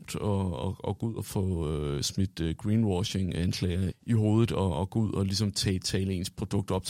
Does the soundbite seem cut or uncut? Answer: cut